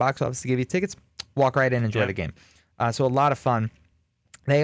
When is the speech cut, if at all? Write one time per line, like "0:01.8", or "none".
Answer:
none